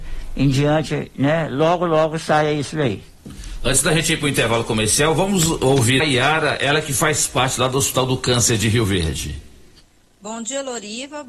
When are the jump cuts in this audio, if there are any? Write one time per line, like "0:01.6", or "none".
0:06.0

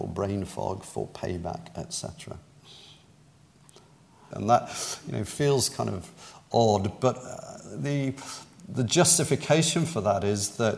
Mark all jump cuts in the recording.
0:04.3

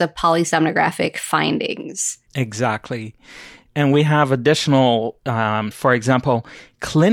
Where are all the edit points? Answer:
0:02.3
0:05.7

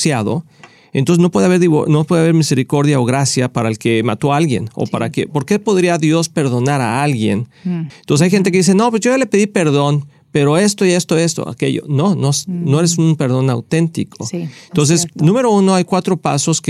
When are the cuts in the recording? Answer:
0:07.9

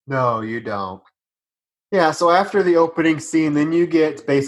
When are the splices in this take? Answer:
none

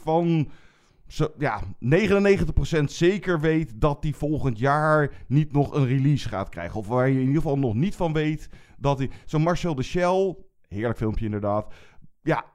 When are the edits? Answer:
none

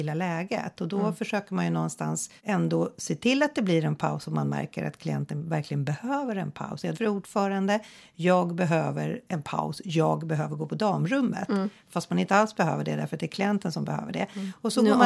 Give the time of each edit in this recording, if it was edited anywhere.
0:02.4
0:06.9

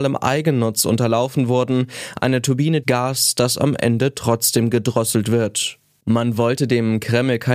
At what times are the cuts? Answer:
0:02.8

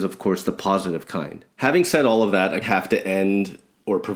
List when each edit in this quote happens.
0:01.5
0:02.6

